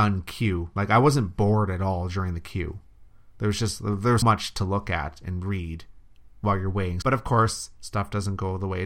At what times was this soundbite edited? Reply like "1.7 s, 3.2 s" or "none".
4.2 s, 7.0 s